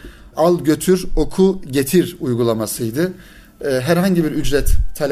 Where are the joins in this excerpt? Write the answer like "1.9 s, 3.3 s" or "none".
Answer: none

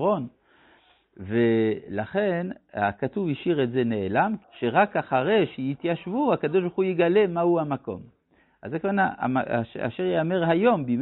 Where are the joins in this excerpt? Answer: 4.4 s

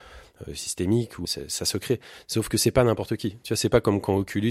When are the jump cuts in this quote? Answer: 1.2 s

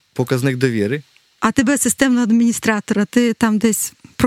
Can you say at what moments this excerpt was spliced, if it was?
1.4 s

